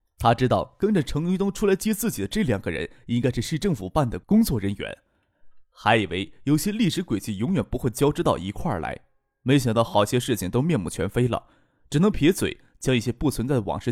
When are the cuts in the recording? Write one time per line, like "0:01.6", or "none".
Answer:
0:12.1